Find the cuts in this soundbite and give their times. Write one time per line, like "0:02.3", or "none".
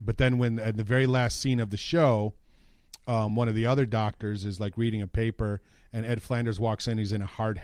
none